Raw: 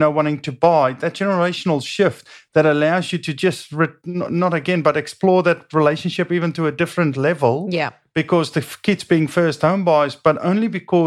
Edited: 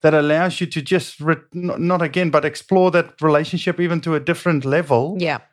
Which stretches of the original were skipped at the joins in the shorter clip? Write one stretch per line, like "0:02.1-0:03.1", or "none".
none